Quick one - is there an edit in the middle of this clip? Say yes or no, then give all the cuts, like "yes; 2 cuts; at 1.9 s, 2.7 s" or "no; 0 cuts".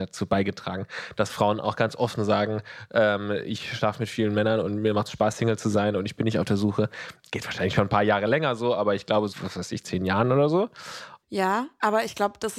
yes; 2 cuts; at 9.3 s, 11.2 s